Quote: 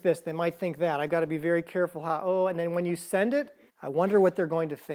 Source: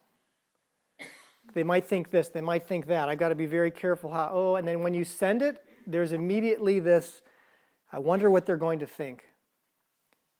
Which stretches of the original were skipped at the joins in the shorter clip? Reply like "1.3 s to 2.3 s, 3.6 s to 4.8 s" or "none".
5.8 s to 7.8 s